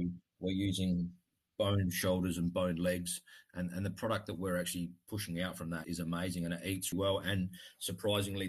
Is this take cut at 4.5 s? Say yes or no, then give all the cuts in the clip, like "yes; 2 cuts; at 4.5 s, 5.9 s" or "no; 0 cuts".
no; 2 cuts; at 5.8 s, 6.9 s